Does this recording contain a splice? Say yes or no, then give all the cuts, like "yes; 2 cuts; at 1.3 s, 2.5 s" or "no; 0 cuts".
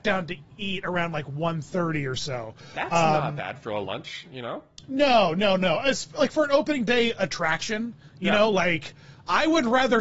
no; 0 cuts